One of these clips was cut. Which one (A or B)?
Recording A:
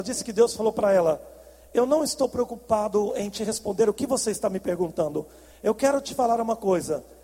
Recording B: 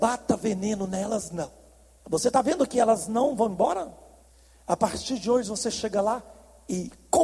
B